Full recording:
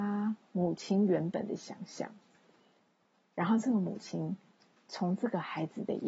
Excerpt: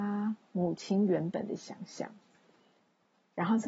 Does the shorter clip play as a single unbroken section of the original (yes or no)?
yes